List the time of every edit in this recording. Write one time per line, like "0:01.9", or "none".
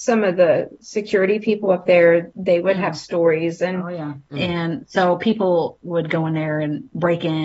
0:04.3